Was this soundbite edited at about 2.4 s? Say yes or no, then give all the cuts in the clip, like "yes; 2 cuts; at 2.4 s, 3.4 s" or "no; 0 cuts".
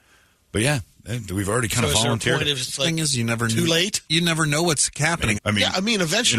no; 2 cuts; at 4.1 s, 5.3 s